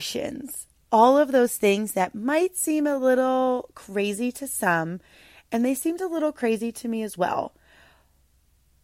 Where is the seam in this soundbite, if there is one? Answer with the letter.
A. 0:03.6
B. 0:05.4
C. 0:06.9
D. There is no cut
D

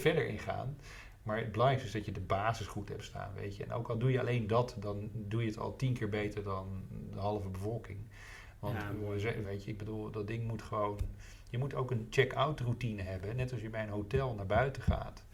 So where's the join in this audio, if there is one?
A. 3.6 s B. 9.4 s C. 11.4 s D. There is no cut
B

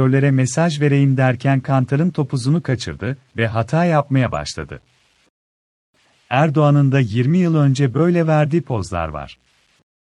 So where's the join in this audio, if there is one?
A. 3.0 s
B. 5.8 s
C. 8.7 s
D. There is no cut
D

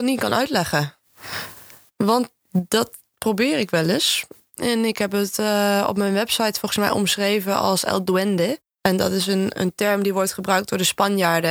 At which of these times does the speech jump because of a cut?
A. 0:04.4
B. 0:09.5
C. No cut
B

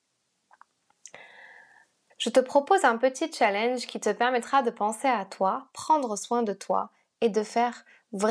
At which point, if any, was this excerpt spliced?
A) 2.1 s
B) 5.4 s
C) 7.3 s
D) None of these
A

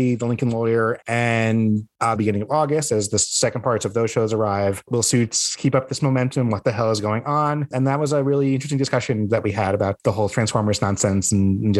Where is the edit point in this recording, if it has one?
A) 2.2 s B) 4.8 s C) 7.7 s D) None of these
A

